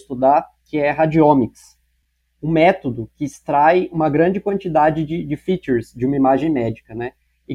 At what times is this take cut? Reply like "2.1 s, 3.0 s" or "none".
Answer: none